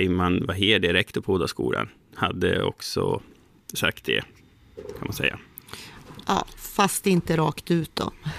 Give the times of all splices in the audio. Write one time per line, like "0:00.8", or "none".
none